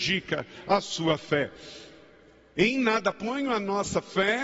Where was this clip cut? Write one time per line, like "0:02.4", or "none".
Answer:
none